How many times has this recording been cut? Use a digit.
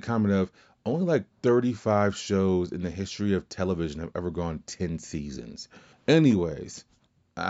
2